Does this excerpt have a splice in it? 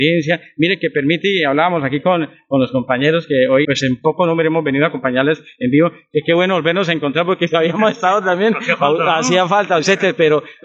yes; 1 cut; at 3.6 s

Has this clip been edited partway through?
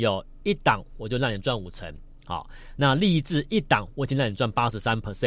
no; 0 cuts

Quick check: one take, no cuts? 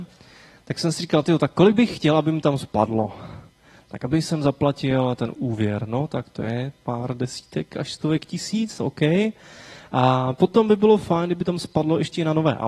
yes; 0 cuts

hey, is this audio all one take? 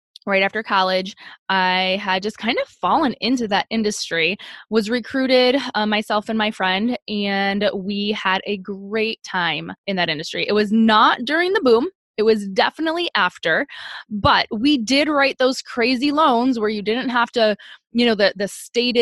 yes; 0 cuts

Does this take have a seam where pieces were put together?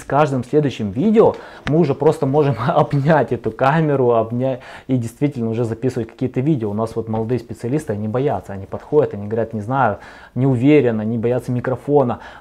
no; 0 cuts

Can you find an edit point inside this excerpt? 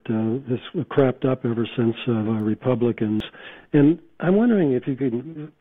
yes; 1 cut; at 2.2 s

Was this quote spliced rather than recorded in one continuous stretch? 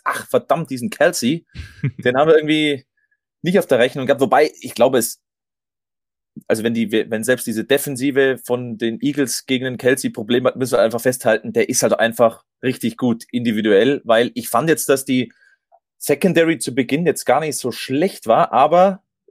no; 0 cuts

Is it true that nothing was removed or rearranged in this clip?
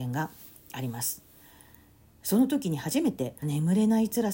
no; 1 cut; at 3.4 s

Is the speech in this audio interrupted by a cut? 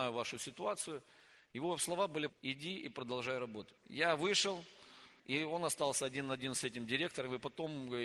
yes; 3 cuts; at 2.3 s, 3.8 s, 5.2 s

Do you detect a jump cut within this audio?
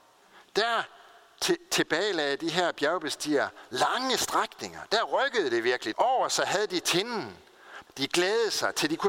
yes; 2 cuts; at 5.9 s, 7.9 s

